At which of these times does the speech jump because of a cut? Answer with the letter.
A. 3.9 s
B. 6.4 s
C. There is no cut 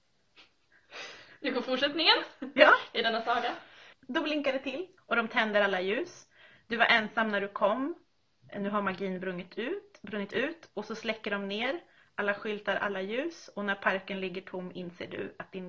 C